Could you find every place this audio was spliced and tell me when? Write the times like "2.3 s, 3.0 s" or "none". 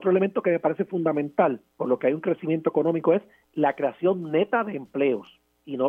1.7 s

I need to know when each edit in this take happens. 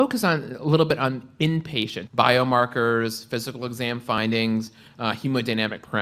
2.1 s

